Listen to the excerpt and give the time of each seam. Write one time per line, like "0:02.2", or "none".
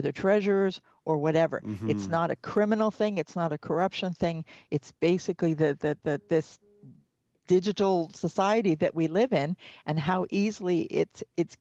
none